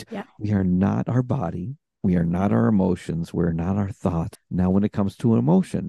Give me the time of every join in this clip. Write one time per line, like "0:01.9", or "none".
0:04.3